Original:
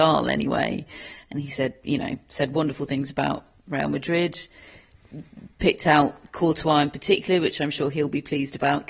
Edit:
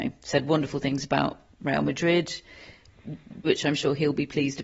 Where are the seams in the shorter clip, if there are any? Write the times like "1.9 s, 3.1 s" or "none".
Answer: 3.4 s